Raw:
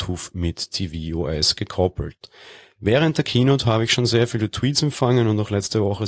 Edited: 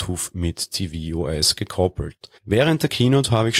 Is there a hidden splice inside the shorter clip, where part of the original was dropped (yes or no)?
yes